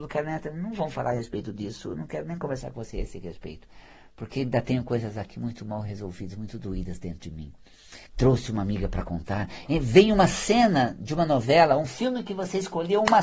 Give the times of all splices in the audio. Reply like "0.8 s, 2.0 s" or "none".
8.1 s